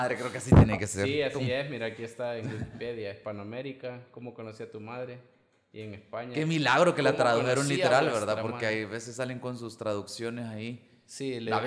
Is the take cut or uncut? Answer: uncut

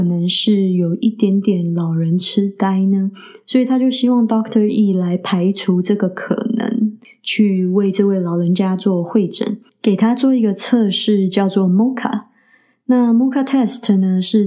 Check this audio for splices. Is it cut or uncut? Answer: uncut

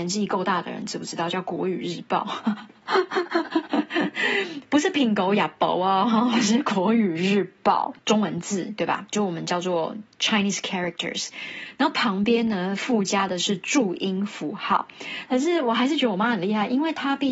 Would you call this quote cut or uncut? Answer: cut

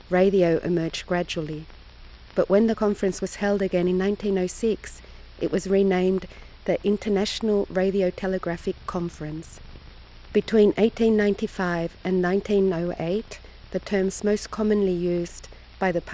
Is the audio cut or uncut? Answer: cut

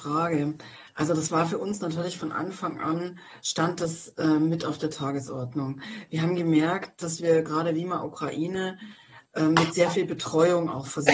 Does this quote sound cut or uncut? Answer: uncut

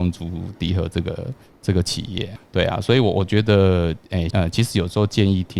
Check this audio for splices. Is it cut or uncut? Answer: cut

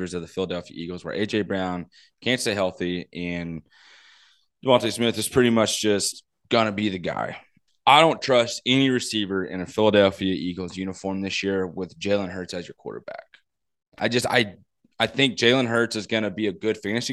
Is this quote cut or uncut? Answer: uncut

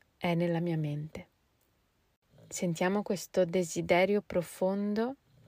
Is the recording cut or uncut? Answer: uncut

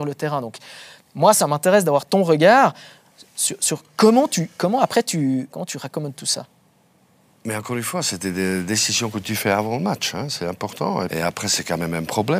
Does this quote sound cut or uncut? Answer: cut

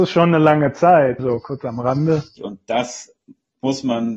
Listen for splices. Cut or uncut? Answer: cut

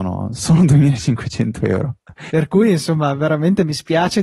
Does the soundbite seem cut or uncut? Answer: cut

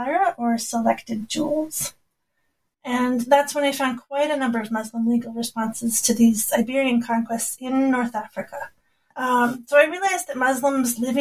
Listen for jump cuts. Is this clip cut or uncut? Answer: cut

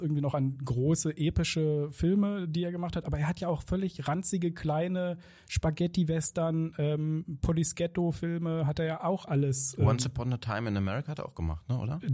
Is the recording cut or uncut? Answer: uncut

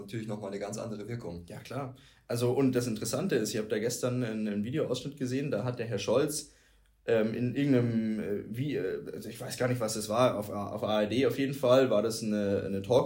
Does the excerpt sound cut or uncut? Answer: uncut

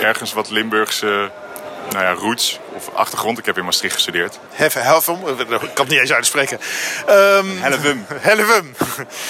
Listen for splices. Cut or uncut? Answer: cut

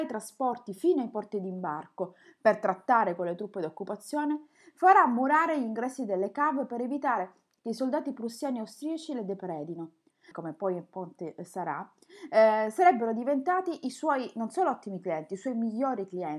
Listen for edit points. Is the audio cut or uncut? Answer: cut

